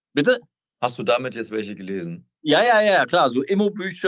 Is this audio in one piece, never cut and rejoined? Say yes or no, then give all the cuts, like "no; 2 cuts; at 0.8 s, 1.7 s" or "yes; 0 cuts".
yes; 0 cuts